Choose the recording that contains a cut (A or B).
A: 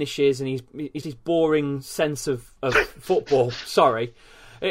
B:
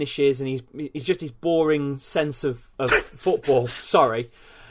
A